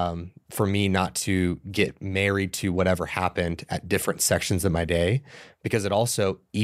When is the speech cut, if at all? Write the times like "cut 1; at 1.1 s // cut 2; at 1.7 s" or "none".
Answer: none